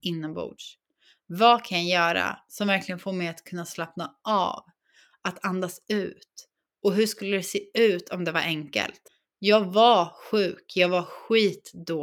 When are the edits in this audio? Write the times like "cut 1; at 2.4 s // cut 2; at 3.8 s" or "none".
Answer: none

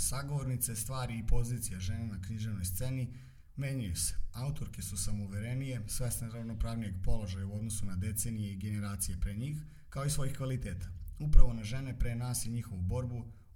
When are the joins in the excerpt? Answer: none

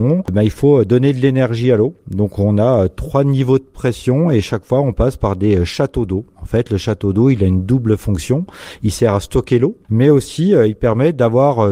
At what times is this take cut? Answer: cut 1; at 9.9 s

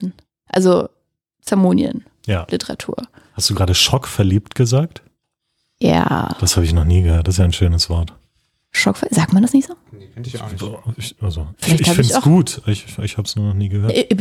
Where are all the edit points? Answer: cut 1; at 3.3 s

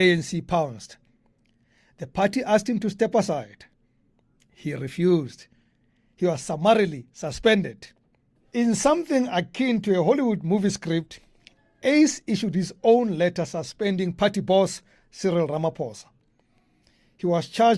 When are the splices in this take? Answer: none

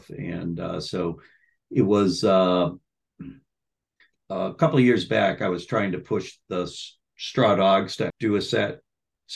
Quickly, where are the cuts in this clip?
cut 1; at 4.1 s // cut 2; at 8.1 s

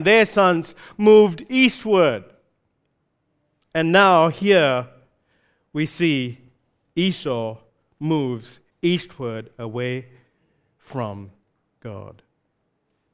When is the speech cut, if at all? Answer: none

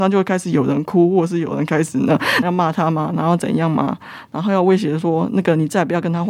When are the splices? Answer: cut 1; at 2.4 s

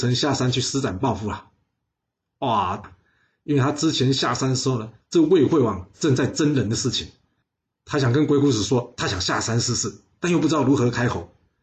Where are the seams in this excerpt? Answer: cut 1; at 2.8 s // cut 2; at 5.0 s

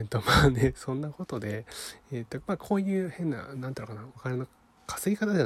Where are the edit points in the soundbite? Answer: none

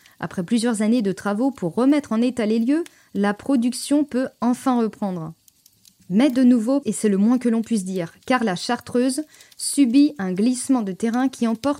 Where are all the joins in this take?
cut 1; at 6.8 s

